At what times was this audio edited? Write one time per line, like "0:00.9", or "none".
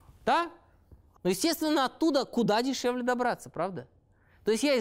0:01.1